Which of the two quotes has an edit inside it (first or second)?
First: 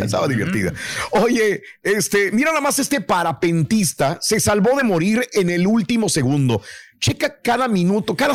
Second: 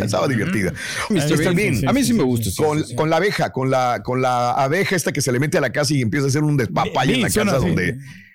second